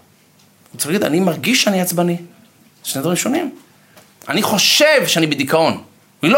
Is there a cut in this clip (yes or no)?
no